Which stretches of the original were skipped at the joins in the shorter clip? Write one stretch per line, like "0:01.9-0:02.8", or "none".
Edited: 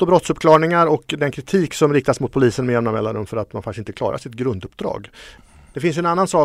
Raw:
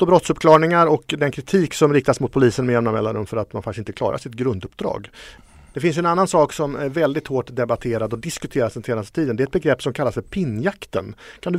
none